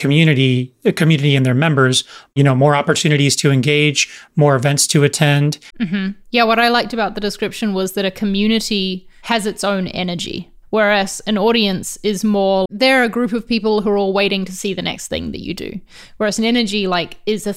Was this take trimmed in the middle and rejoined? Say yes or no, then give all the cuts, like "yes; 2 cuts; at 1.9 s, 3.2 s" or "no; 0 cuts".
yes; 2 cuts; at 5.7 s, 12.7 s